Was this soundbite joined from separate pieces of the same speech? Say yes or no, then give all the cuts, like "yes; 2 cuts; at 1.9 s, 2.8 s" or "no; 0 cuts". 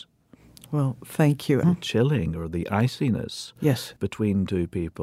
yes; 1 cut; at 1.6 s